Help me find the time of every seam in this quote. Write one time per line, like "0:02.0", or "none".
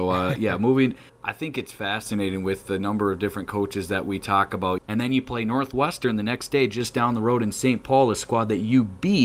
0:01.1
0:04.8